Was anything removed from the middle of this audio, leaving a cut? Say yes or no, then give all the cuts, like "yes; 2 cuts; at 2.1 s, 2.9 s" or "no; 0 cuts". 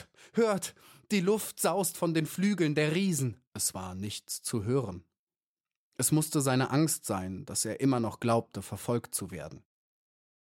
yes; 1 cut; at 3.4 s